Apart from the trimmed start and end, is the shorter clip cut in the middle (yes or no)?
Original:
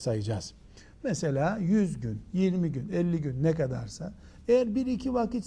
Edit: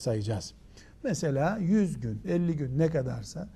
yes